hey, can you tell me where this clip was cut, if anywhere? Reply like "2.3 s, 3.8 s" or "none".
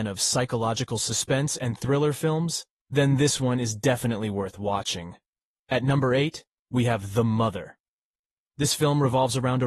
none